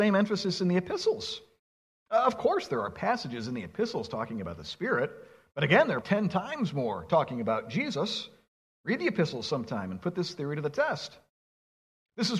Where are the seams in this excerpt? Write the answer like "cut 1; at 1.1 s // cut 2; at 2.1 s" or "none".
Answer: cut 1; at 6.0 s